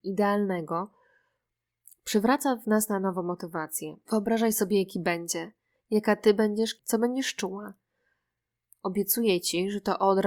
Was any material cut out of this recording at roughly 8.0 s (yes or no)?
no